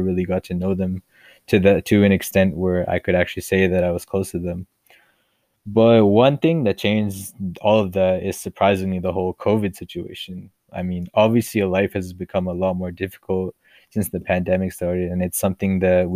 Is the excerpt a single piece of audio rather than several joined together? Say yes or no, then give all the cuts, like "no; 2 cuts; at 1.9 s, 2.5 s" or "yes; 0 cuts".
yes; 0 cuts